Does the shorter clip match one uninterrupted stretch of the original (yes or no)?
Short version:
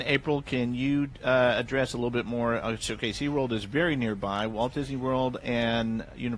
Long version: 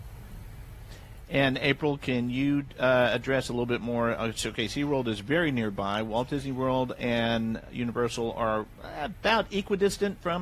yes